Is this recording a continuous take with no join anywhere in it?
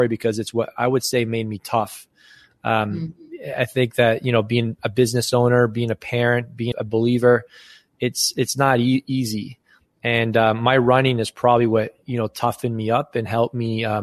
no; 1 cut; at 6.7 s

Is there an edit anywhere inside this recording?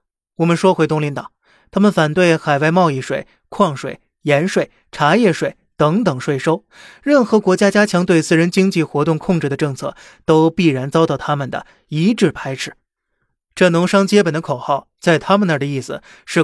no; 0 cuts

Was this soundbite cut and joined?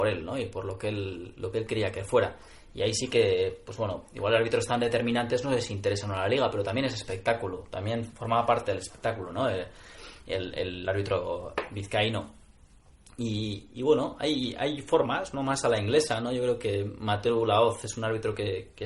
no; 0 cuts

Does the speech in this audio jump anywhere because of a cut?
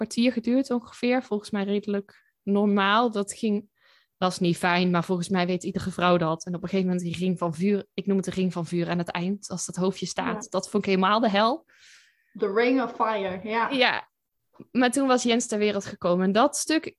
no; 0 cuts

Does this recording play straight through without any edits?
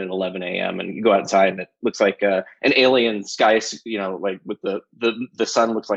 yes; 0 cuts

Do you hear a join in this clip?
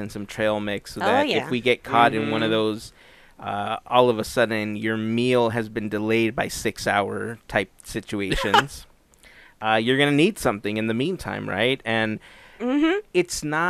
no; 0 cuts

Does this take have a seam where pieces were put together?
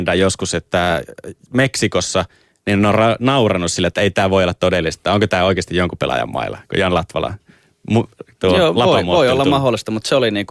yes; 1 cut; at 2.5 s

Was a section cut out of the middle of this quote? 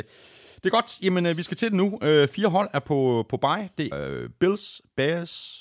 yes; 1 cut; at 3.9 s

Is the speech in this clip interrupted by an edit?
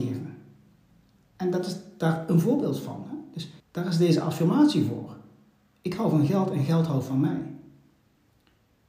yes; 1 cut; at 3.6 s

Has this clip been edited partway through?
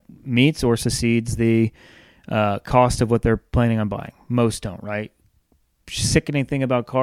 no; 0 cuts

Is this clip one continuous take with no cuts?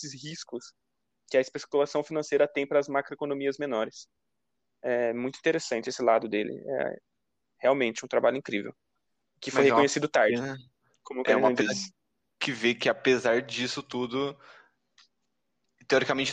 yes; 0 cuts

